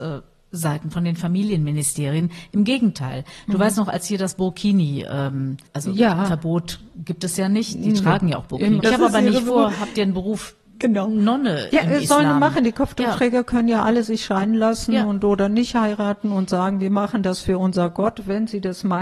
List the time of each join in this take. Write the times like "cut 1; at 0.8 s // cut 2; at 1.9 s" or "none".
cut 1; at 5.7 s // cut 2; at 8.8 s